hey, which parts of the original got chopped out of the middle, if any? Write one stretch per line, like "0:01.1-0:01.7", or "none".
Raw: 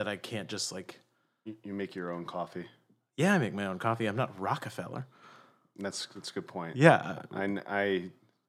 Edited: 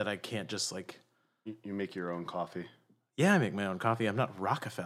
none

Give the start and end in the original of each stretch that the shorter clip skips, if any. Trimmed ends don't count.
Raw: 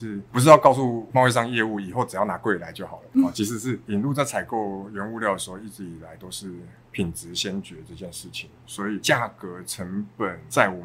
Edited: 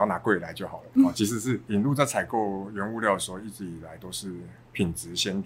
none

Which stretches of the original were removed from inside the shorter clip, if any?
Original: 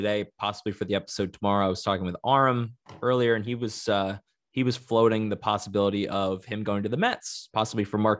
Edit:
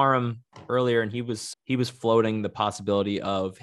0:03.9-0:04.4

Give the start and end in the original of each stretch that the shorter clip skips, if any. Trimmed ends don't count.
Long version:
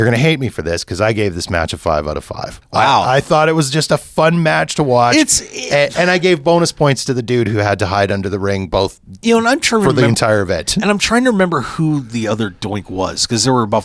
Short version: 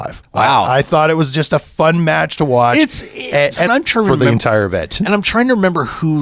0:06.1-0:09.4

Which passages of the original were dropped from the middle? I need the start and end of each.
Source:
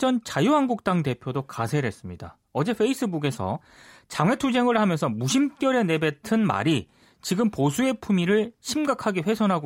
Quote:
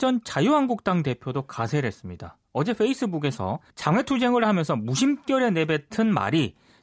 0:03.7-0:04.0

